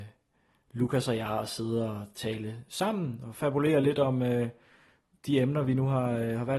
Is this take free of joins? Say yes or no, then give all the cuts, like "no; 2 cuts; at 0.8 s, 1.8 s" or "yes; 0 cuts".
yes; 0 cuts